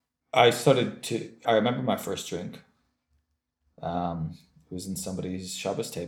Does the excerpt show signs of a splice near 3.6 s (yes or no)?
no